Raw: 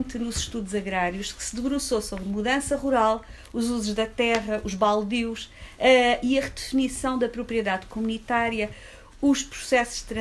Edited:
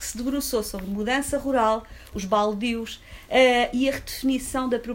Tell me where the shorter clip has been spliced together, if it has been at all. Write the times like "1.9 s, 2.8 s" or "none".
2.1 s